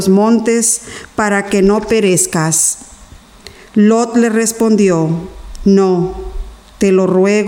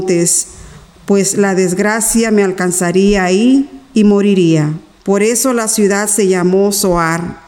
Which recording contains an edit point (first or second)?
second